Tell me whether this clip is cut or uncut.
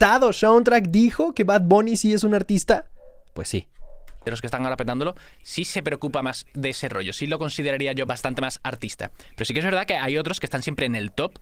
uncut